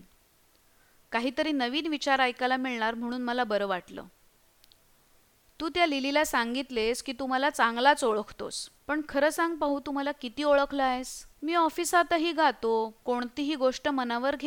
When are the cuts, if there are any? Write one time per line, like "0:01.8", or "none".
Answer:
0:08.8
0:11.3